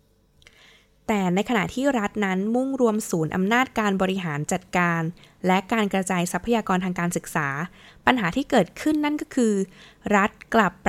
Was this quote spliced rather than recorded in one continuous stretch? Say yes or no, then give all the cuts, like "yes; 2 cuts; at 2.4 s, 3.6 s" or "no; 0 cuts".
no; 0 cuts